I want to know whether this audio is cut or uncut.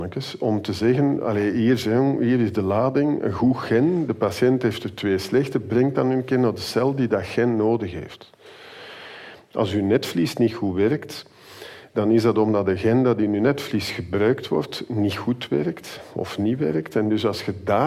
uncut